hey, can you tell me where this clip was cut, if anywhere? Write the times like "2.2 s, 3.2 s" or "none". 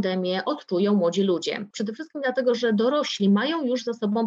1.7 s